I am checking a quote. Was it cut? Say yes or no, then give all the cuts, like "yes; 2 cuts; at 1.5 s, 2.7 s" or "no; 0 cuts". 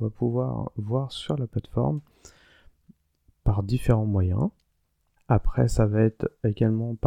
yes; 1 cut; at 5.2 s